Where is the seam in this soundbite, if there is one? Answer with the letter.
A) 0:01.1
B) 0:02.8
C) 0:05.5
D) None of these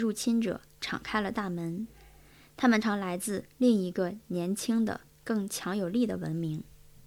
B